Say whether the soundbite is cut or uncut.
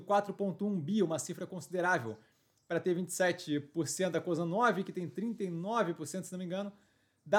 uncut